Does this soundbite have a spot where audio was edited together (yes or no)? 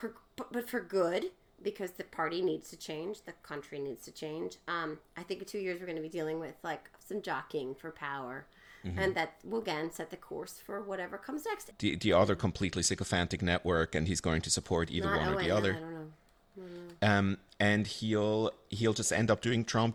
yes